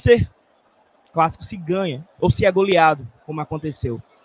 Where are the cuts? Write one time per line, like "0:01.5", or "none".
0:01.0
0:02.1